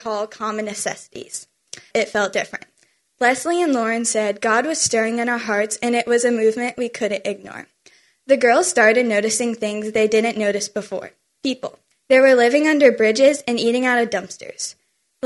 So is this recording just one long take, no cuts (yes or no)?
no